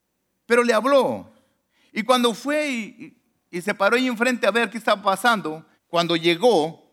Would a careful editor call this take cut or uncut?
cut